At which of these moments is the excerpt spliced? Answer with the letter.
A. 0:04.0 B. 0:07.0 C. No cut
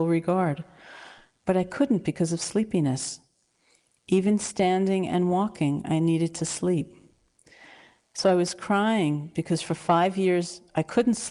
C